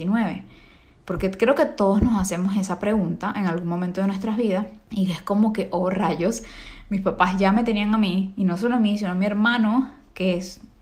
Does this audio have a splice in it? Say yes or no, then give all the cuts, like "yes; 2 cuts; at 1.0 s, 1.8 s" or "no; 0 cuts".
no; 0 cuts